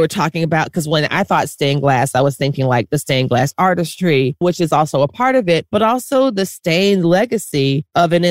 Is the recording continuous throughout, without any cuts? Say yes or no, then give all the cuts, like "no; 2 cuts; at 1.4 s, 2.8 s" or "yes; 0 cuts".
yes; 0 cuts